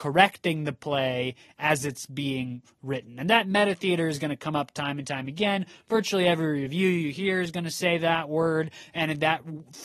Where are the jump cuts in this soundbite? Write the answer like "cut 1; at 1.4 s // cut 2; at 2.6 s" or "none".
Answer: none